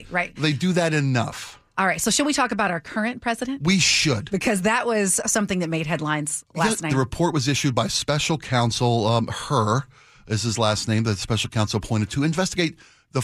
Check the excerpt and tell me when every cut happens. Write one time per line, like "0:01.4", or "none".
0:06.9

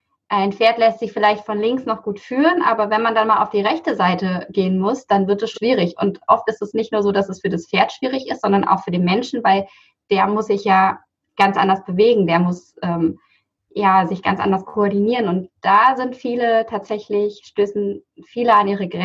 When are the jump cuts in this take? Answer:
0:05.5

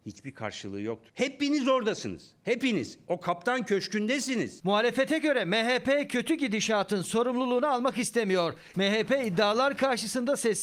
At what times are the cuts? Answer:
0:08.7

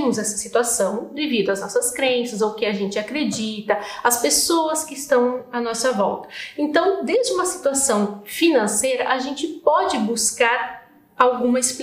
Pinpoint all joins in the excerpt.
none

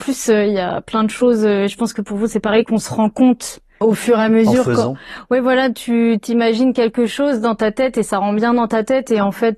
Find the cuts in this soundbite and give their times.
none

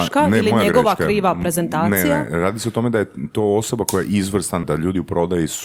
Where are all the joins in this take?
0:04.6

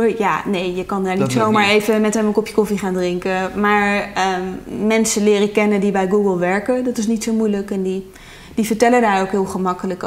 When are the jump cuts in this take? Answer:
none

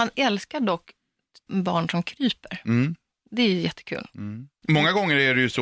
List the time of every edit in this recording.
0:01.5

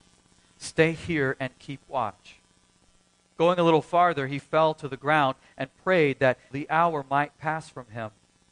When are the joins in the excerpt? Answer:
0:06.5

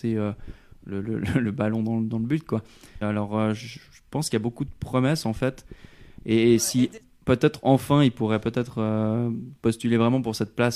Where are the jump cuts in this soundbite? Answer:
0:03.0

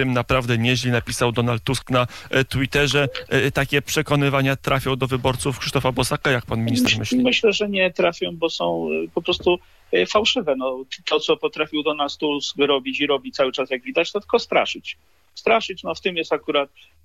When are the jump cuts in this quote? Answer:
none

